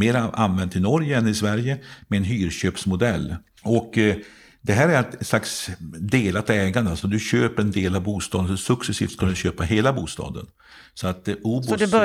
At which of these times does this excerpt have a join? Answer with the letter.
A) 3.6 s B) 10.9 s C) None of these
A